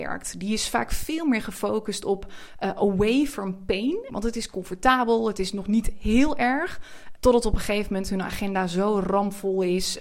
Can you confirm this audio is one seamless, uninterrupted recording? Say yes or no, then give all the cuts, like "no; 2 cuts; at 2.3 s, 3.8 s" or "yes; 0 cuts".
no; 2 cuts; at 4.1 s, 7.2 s